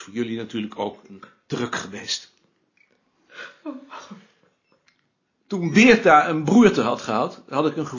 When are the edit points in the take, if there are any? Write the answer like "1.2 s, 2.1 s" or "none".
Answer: none